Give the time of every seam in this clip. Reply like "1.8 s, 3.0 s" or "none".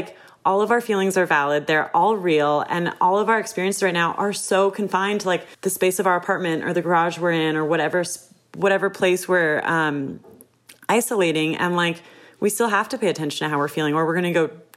5.5 s